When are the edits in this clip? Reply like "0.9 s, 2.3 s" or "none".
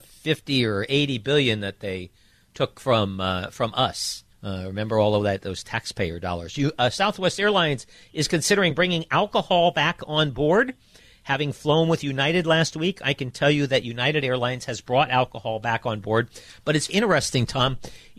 4.3 s, 16.9 s